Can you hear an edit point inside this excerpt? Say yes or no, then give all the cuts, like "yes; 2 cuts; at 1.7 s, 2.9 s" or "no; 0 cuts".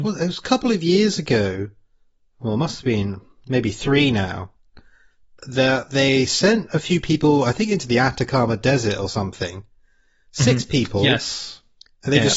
no; 0 cuts